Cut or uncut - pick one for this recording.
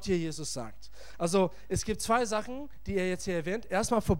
uncut